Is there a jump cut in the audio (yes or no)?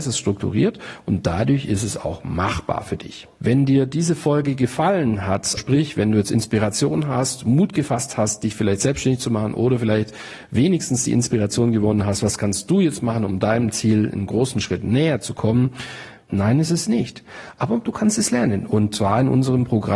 yes